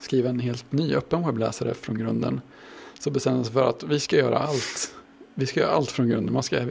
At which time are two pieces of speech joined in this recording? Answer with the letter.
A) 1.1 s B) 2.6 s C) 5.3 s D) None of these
D